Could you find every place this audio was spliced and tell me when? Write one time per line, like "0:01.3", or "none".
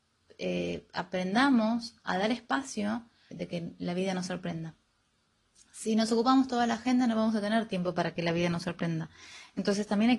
0:03.3